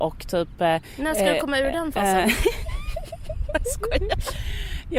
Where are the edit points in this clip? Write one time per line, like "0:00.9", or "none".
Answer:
none